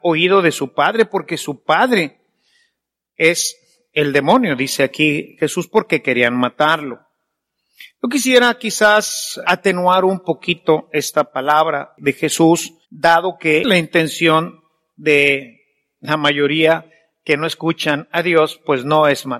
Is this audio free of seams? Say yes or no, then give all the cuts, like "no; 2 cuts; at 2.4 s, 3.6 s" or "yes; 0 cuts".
no; 2 cuts; at 9.4 s, 12.8 s